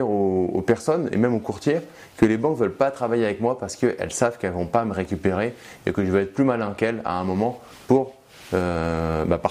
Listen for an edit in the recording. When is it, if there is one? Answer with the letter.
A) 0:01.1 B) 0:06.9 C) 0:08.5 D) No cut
D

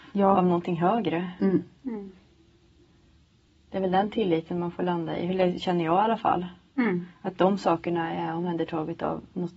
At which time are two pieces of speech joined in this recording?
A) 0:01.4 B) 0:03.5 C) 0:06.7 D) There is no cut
D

